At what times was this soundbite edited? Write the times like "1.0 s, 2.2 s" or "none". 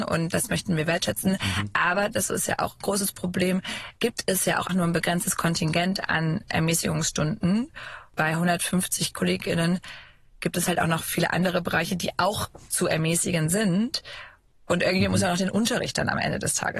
4.7 s

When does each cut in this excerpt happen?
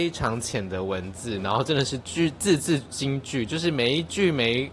none

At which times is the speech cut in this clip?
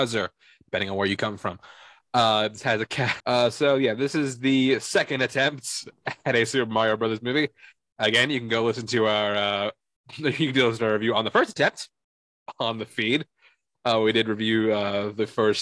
3.2 s

